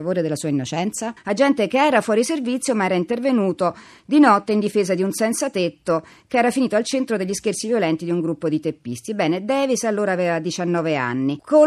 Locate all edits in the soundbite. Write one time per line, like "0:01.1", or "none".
0:01.2